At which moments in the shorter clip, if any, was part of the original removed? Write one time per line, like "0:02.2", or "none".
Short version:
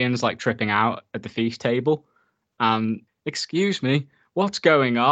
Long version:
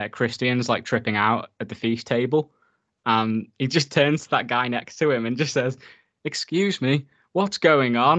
0:03.1